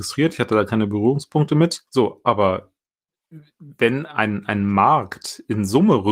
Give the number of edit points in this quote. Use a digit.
1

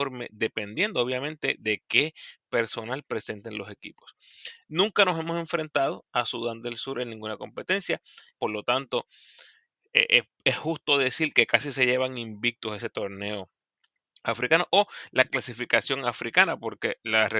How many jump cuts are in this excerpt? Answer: 1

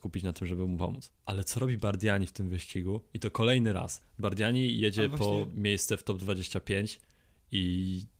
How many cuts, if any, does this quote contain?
0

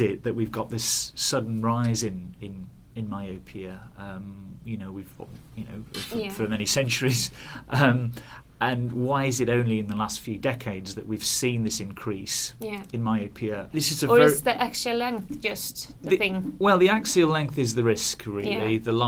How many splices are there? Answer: 2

